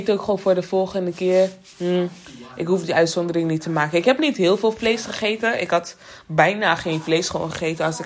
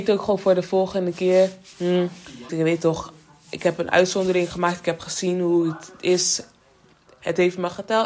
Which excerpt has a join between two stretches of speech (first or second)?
second